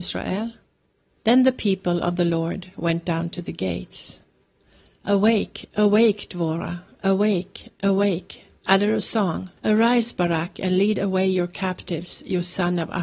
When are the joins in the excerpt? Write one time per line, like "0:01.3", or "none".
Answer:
0:01.2
0:09.6